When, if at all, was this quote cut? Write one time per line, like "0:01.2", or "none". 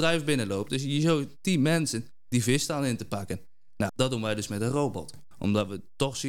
0:03.9
0:05.3